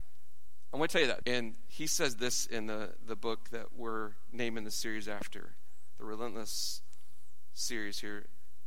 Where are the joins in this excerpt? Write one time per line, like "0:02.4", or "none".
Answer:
0:01.2